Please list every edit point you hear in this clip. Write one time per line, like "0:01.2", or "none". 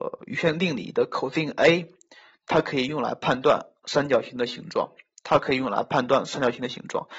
none